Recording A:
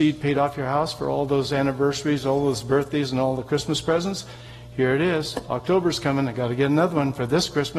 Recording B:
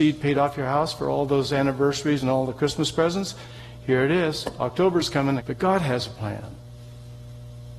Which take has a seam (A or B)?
B